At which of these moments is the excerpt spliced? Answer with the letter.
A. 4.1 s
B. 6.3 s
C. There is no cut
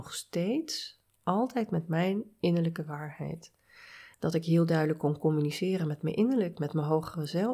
A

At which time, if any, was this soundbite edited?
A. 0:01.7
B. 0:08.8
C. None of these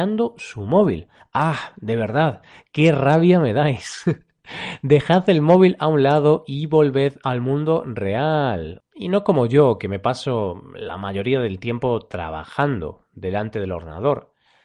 B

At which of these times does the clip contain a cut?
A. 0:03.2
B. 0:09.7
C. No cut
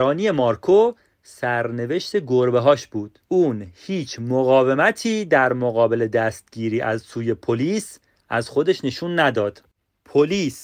A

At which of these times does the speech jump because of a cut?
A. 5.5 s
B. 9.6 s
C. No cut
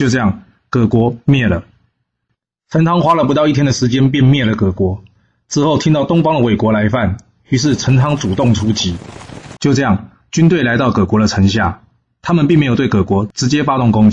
B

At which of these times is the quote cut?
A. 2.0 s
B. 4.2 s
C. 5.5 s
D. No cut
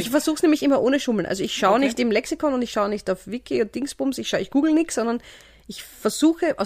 D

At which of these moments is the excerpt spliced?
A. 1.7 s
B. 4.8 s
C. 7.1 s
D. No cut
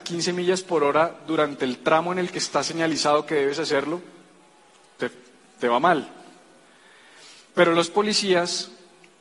D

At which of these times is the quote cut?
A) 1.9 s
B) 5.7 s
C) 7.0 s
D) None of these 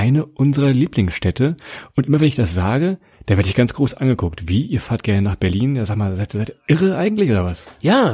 D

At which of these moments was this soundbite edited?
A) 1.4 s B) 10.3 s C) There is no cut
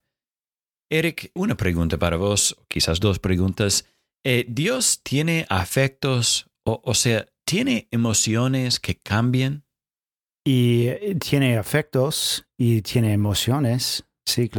A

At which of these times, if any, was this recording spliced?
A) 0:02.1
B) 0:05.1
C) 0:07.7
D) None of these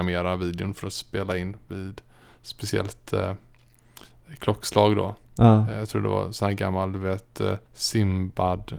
C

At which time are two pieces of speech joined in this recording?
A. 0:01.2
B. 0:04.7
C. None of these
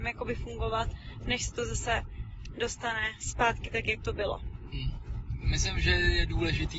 C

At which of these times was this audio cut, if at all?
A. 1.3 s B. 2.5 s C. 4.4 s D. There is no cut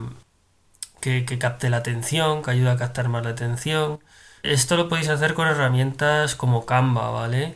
C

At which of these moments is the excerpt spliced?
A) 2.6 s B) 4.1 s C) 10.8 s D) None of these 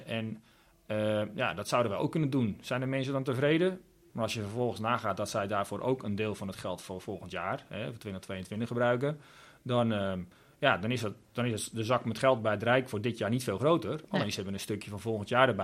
B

